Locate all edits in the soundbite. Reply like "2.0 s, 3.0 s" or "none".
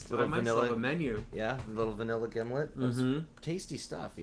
none